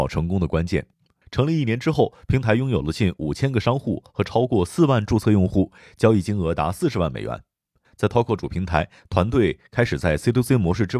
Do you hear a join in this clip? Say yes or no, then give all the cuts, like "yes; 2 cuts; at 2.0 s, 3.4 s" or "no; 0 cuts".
yes; 2 cuts; at 1.2 s, 7.8 s